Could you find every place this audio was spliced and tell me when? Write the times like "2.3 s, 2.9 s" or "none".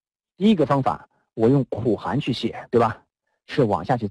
none